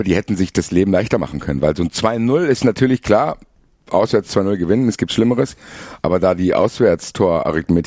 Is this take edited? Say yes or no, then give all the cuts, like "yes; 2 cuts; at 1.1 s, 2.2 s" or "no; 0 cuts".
no; 0 cuts